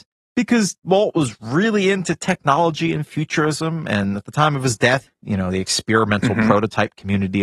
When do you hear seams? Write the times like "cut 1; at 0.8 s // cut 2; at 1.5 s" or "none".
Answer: cut 1; at 5.1 s